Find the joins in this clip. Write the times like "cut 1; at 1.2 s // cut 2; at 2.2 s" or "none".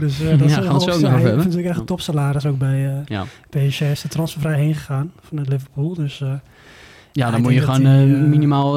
none